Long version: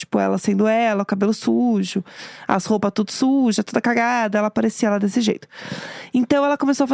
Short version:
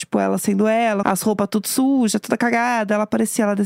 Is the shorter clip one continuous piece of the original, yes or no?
no